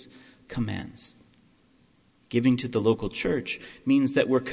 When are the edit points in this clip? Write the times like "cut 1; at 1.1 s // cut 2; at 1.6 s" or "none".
none